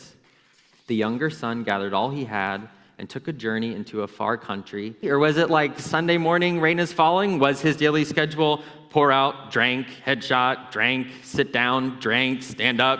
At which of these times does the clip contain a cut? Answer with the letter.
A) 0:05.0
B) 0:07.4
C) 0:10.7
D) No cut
A